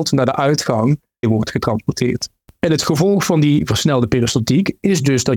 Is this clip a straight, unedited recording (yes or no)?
no